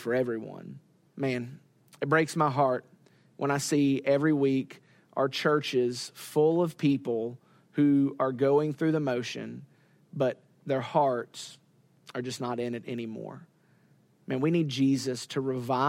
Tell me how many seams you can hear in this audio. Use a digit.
1